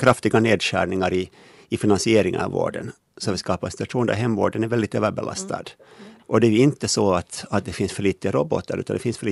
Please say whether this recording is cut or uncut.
uncut